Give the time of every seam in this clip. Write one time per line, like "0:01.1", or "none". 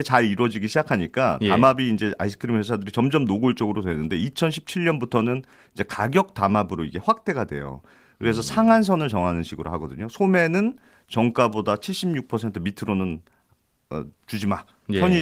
none

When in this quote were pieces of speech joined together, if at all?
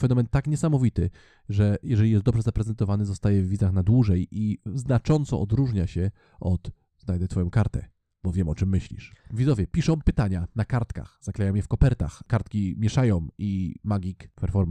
0:09.2

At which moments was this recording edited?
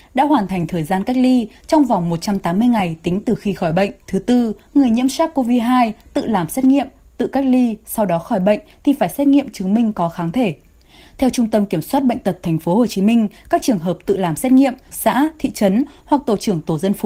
0:04.0
0:14.9

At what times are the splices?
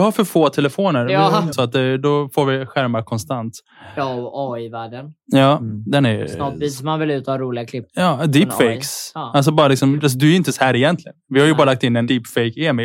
0:01.5

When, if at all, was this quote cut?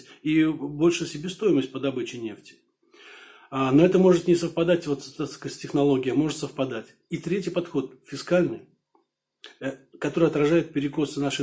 none

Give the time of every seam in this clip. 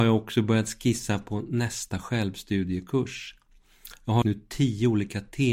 0:04.2

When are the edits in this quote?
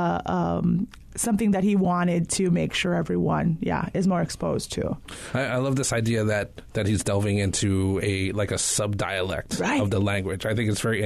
none

